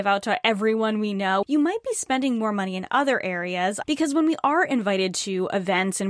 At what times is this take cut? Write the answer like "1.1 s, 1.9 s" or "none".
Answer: 1.4 s, 3.8 s